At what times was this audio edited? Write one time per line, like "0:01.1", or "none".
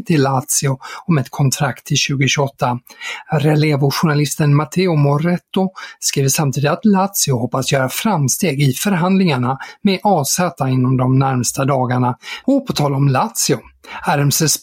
0:12.4